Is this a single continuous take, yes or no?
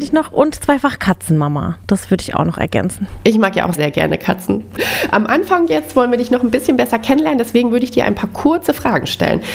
no